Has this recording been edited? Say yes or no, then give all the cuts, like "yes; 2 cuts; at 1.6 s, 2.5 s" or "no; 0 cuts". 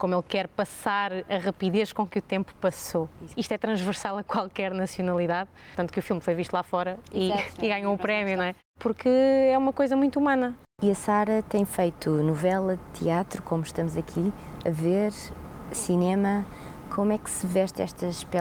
no; 0 cuts